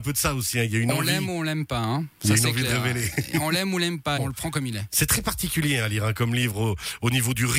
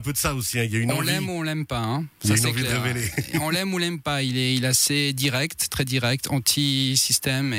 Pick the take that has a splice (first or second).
first